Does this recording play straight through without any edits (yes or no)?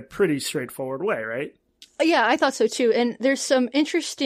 yes